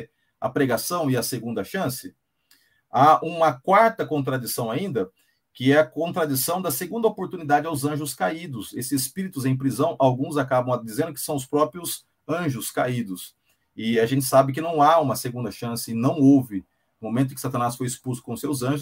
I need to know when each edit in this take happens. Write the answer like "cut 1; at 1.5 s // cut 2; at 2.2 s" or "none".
none